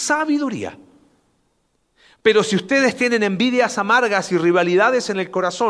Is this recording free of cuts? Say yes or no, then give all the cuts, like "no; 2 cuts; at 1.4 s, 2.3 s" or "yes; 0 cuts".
yes; 0 cuts